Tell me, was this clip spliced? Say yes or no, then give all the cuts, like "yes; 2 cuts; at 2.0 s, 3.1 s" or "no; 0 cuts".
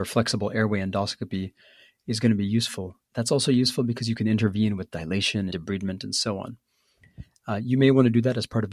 yes; 1 cut; at 5.5 s